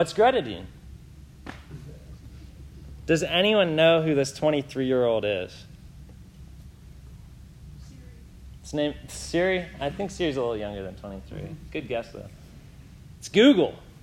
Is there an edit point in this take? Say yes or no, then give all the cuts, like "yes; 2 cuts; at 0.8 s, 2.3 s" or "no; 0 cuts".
no; 0 cuts